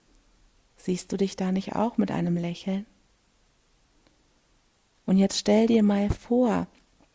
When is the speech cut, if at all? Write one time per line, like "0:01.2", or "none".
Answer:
0:05.0